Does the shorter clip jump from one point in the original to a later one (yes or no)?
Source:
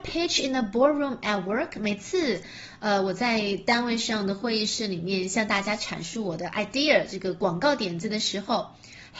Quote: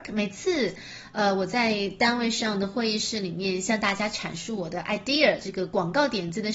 no